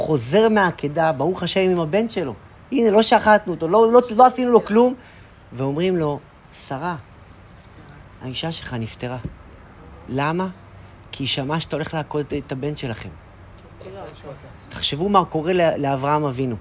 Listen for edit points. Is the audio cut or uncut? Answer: cut